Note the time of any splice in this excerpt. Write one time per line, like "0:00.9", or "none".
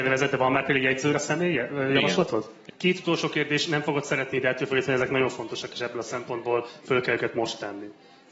0:02.7